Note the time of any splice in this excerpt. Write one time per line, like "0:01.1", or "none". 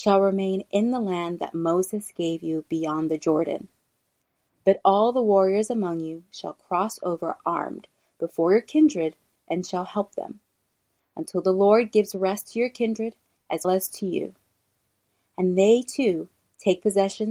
0:13.6